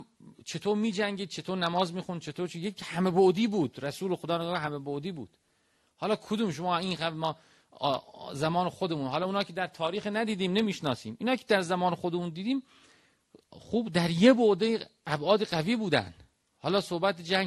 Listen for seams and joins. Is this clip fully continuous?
yes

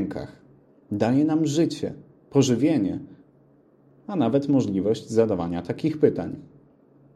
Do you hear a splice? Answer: no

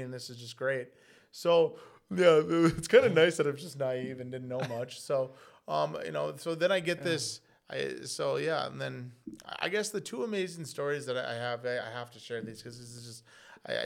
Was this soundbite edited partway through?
no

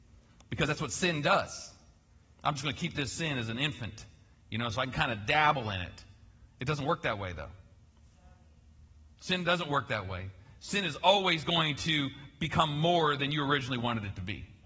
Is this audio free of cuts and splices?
no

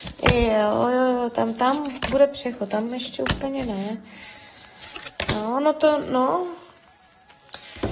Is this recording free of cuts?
yes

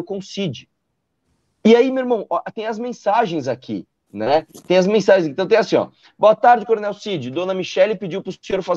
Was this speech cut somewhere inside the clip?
no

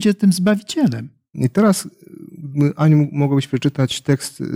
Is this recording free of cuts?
no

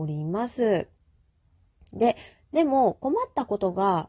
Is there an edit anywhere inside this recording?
no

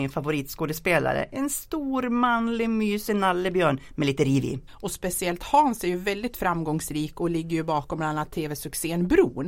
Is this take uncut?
no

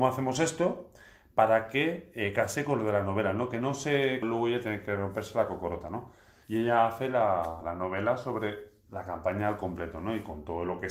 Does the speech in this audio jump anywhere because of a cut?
yes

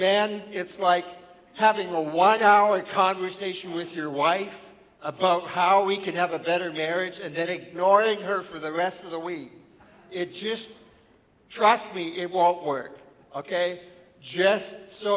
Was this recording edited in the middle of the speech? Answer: no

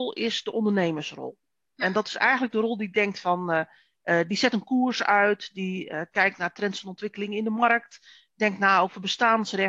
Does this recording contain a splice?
no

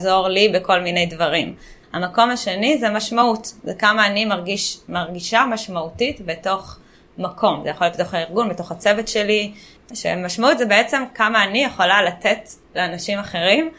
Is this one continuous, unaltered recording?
no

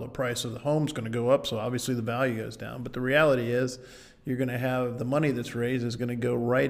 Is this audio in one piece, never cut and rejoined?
yes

